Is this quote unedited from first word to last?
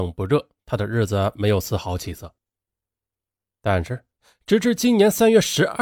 yes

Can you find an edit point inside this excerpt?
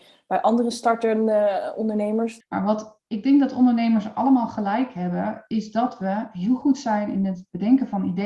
yes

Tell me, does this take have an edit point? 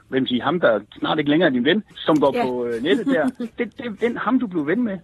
yes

